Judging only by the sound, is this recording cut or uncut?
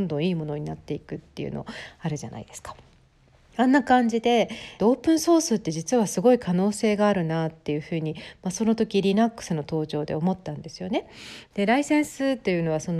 cut